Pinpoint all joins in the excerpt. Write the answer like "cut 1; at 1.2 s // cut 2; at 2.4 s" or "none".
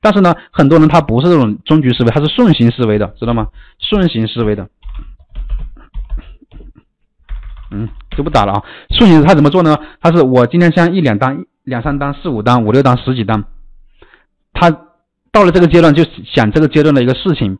none